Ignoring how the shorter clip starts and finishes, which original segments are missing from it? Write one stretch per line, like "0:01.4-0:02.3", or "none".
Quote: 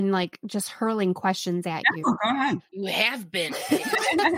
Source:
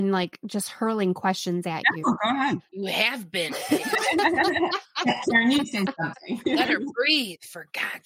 none